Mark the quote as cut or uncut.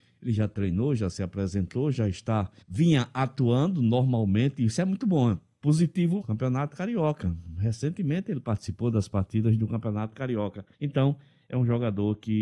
cut